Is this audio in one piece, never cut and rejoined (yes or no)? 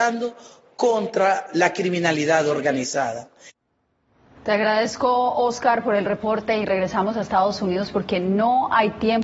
no